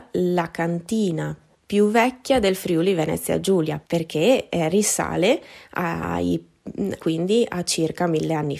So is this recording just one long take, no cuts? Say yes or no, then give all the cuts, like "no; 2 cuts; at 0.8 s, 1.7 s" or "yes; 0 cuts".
no; 2 cuts; at 3.8 s, 7.0 s